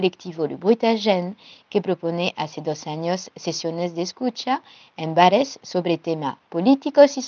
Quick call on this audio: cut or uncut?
uncut